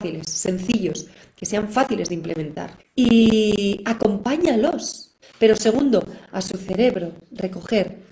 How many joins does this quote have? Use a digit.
2